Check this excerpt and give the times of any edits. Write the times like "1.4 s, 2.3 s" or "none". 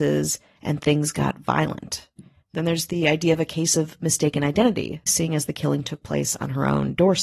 2.4 s, 5.1 s

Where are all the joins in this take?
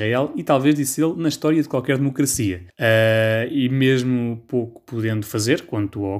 2.7 s

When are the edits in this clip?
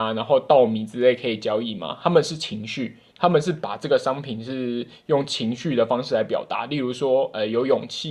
none

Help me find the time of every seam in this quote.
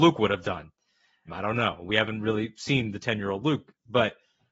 1.3 s

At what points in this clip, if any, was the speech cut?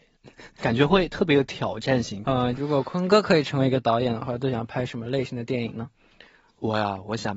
2.2 s

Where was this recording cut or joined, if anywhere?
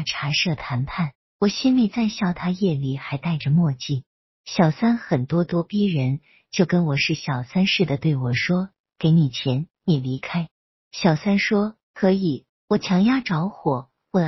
1.3 s, 10.6 s, 12.5 s

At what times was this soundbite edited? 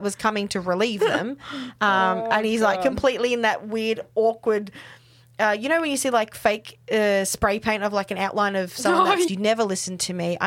9.3 s

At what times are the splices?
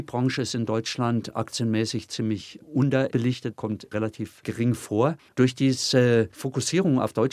none

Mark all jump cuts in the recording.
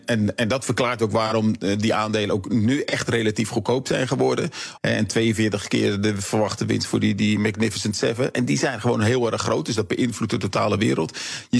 4.8 s

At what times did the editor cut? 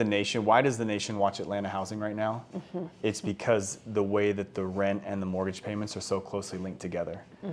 none

